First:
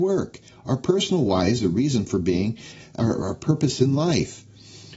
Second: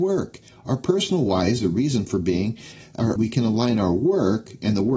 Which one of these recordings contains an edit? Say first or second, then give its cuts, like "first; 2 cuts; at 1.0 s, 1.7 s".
second; 1 cut; at 3.2 s